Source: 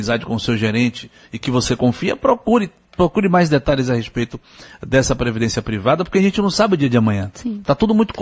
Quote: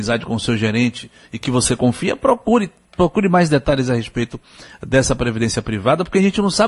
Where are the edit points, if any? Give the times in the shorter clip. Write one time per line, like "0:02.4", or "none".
none